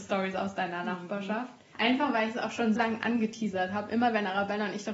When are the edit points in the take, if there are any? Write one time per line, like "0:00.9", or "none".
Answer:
0:01.7
0:02.7